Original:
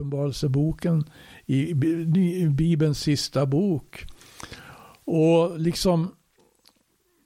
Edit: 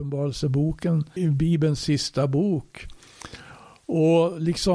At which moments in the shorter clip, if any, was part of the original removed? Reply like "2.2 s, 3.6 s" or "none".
1.2 s

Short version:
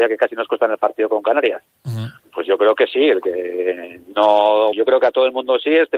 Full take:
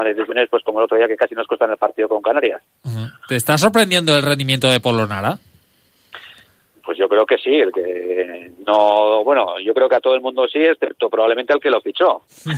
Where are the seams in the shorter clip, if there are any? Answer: 2.2 s, 4.7 s

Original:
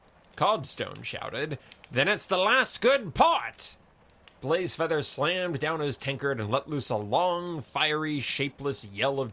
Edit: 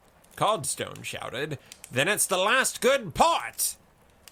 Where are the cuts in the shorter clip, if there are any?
none

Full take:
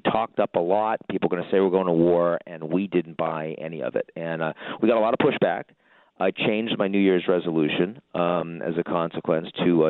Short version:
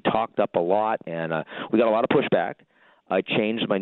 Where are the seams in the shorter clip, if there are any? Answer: 1.0 s

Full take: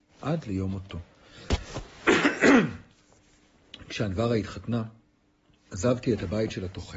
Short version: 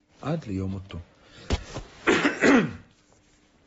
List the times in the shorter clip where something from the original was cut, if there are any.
none

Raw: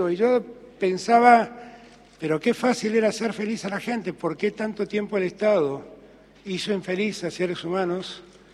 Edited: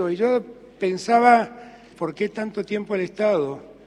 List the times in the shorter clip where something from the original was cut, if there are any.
1.9 s

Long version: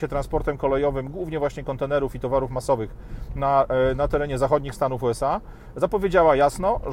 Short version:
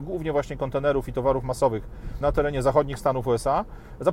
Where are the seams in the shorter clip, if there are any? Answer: 2.2 s

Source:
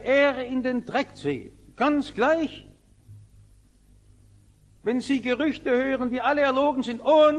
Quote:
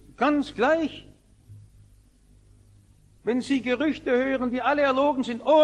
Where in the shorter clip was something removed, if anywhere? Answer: none

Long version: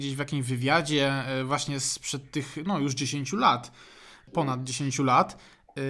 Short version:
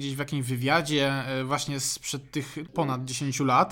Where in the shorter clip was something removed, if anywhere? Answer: 2.6 s

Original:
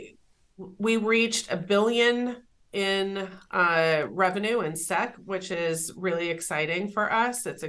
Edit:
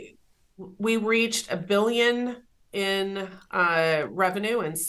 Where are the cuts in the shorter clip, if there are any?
none

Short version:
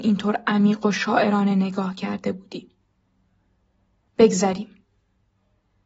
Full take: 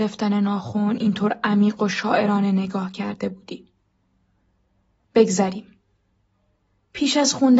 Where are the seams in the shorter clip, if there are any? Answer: none

